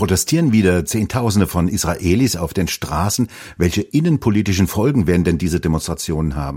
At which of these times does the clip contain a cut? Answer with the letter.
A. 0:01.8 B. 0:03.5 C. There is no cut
C